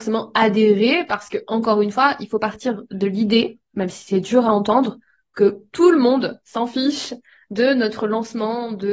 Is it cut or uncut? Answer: uncut